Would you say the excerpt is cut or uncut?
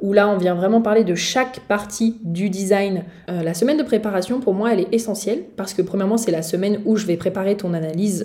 cut